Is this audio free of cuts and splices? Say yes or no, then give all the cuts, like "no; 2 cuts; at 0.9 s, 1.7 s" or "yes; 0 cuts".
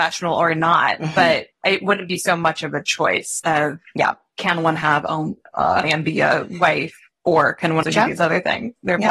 no; 2 cuts; at 5.8 s, 7.8 s